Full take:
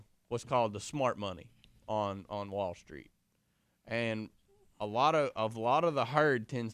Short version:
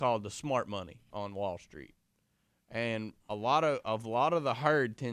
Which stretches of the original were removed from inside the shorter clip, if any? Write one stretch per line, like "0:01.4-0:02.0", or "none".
0:01.6-0:02.3
0:04.4-0:04.7